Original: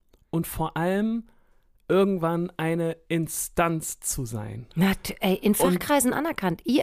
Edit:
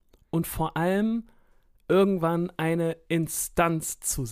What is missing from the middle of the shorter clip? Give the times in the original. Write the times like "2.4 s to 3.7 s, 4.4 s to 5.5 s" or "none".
none